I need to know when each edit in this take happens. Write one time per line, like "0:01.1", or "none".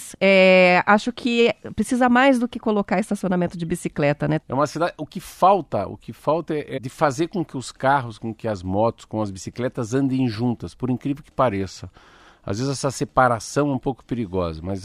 0:04.4
0:06.8